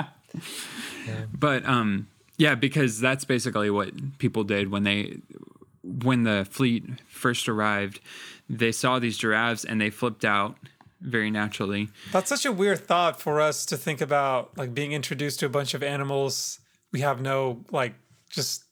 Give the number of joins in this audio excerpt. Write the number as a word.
zero